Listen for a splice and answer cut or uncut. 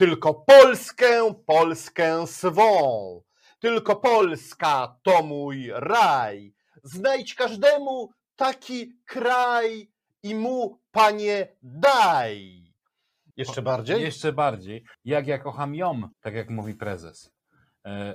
cut